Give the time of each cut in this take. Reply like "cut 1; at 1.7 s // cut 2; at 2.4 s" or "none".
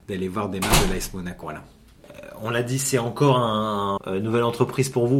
cut 1; at 1.4 s // cut 2; at 4.0 s